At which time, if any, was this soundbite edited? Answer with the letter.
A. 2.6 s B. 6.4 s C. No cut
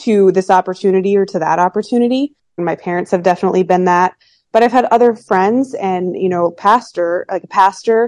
A